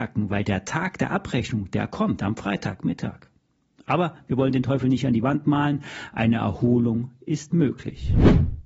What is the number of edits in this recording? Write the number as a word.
zero